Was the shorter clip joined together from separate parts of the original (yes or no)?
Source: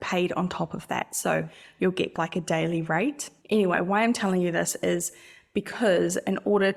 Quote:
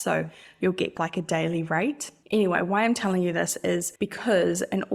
yes